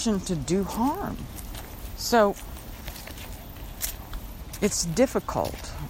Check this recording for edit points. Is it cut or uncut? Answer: uncut